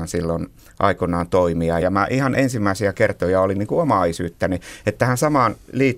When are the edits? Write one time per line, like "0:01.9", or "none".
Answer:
0:01.8